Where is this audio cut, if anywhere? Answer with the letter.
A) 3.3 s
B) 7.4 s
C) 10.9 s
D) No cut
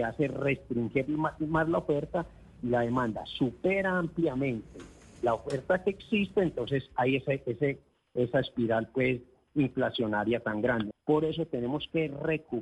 C